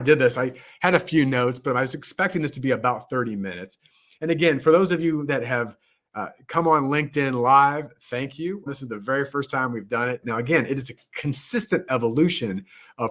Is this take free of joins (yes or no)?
no